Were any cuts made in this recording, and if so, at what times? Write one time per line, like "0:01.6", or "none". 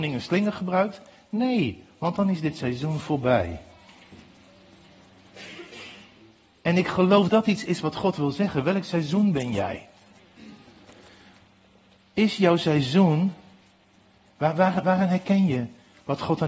0:07.3